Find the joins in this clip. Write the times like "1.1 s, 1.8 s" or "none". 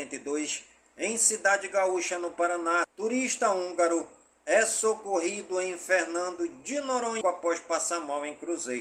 2.8 s, 7.2 s

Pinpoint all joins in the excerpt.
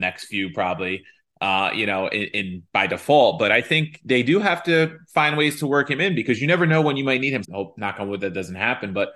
7.4 s

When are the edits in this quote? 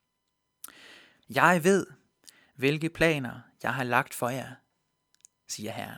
1.2 s

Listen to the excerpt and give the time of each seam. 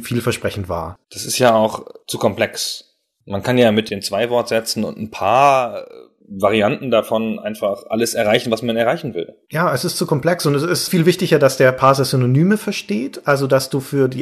1.0 s

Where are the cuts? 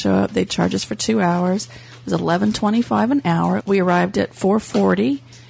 3.6 s

